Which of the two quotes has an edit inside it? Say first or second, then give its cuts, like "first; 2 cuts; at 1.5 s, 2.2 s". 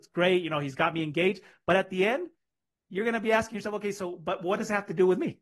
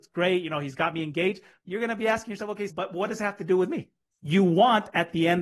second; 3 cuts; at 1.6 s, 2.7 s, 4.1 s